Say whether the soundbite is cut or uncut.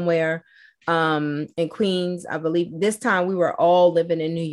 uncut